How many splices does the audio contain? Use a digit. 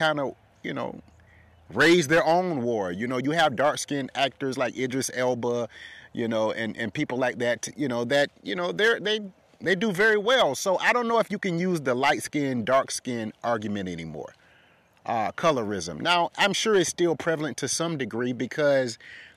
0